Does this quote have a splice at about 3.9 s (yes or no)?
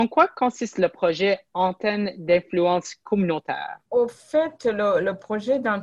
yes